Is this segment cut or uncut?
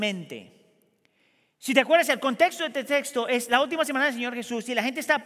uncut